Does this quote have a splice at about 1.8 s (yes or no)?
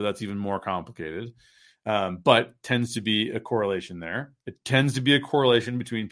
no